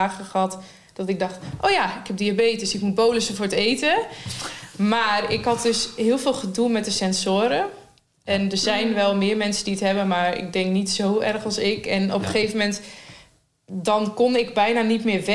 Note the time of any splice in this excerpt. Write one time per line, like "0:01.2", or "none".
none